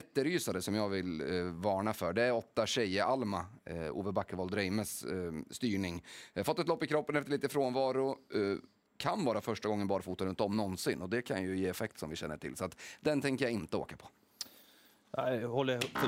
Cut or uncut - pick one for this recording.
uncut